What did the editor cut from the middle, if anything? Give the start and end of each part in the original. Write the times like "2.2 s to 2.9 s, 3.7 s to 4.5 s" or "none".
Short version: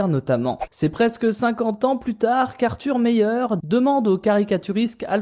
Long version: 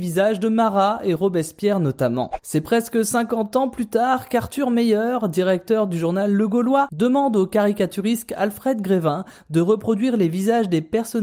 5.3 s to 6.9 s